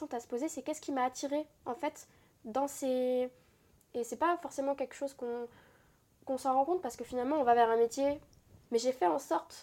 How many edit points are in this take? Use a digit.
2